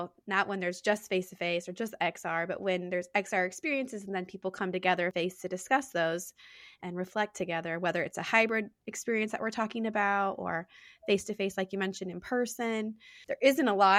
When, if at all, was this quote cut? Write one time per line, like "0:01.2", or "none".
none